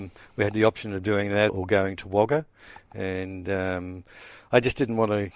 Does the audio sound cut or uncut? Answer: cut